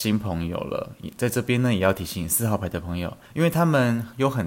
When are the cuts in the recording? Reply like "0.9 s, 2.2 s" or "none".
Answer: 3.2 s